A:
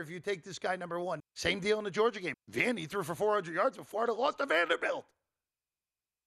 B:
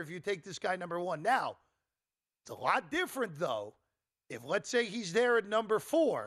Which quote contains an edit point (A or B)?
A